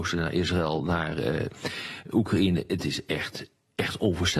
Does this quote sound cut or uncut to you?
uncut